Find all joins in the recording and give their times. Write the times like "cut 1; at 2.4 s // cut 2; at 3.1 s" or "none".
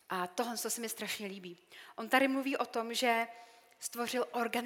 none